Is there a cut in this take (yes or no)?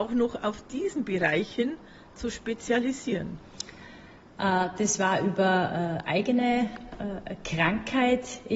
no